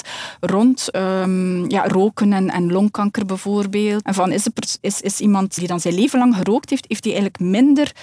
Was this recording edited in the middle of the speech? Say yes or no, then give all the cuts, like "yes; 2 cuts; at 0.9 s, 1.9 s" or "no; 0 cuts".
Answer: yes; 2 cuts; at 4.0 s, 5.6 s